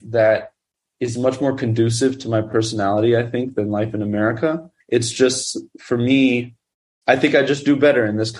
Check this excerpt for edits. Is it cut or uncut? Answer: cut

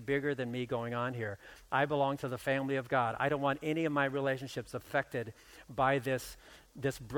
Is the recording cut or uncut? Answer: uncut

